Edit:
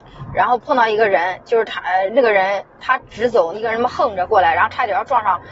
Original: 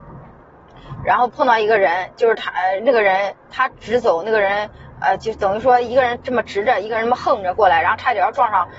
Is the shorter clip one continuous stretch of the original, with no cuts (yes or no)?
no